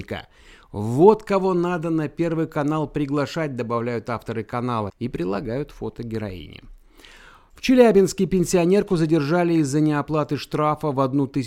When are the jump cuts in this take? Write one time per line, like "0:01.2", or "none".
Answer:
0:04.9